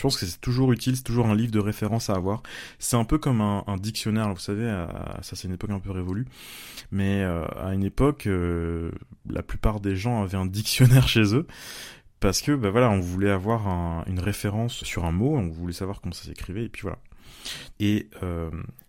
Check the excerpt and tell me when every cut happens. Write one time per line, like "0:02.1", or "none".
0:14.8
0:17.7